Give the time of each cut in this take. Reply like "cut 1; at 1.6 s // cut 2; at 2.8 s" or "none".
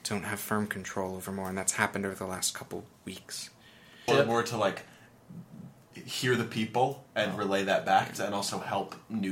cut 1; at 4.1 s // cut 2; at 7.1 s // cut 3; at 8.1 s